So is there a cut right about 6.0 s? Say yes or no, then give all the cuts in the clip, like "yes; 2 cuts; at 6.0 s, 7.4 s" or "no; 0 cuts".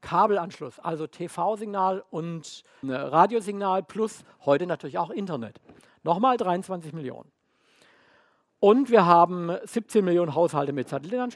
no; 1 cut; at 2.8 s